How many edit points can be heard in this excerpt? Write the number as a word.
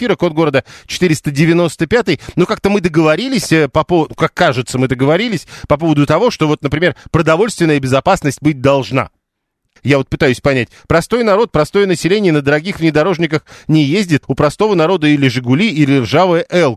two